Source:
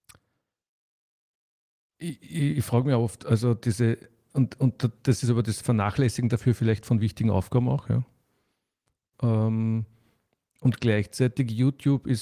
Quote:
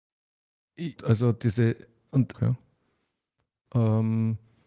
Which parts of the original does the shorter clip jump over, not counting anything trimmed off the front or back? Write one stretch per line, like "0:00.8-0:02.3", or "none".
0:02.2-0:03.2
0:04.6-0:07.8